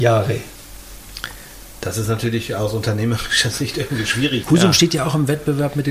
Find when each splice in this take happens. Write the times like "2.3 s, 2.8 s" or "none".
4.4 s